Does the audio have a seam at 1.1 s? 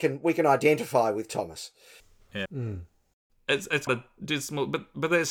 no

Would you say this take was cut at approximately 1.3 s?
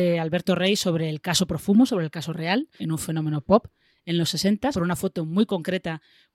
no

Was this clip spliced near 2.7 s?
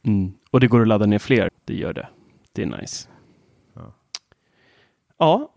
no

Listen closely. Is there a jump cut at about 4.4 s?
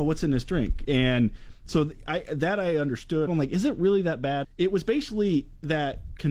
yes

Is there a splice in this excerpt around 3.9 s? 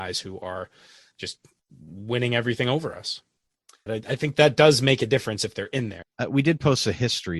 yes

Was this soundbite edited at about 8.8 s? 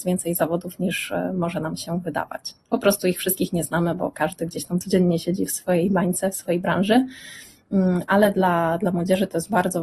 no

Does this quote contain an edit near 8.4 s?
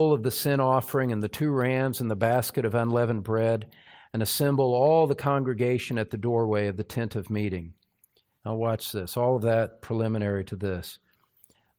yes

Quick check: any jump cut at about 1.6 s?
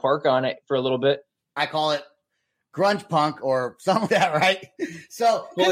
yes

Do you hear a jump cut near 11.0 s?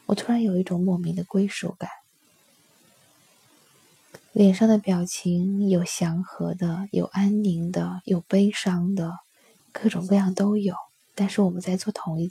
no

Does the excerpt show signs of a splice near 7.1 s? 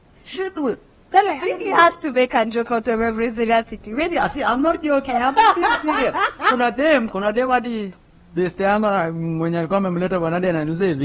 yes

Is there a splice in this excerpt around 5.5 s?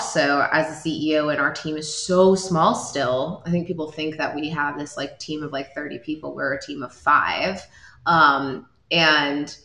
no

